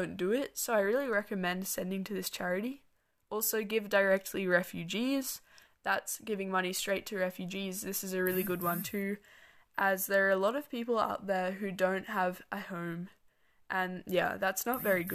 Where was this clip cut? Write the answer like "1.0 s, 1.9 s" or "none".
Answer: none